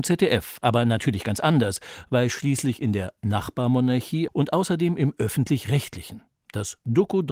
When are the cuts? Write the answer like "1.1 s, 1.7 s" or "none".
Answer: 4.3 s